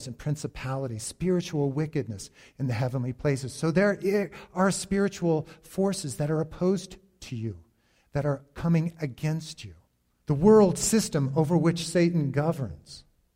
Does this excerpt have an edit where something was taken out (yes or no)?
yes